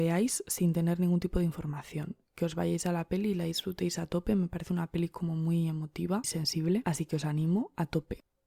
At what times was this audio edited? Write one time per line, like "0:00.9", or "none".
0:06.2